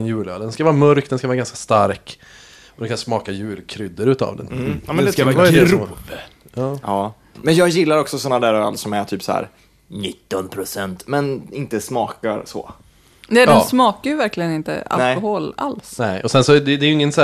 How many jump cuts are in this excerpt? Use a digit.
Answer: 1